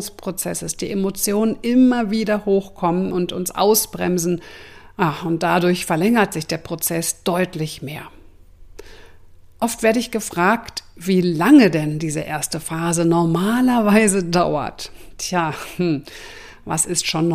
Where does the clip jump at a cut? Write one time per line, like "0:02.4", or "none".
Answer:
none

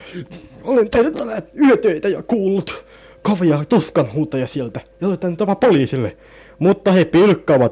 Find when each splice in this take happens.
none

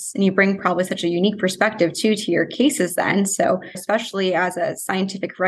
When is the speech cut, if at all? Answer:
0:03.7

